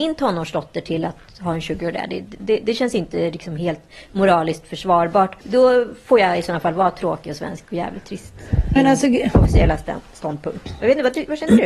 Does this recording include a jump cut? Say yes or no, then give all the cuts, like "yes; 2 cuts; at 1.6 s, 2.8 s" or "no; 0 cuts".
yes; 2 cuts; at 5.4 s, 8.8 s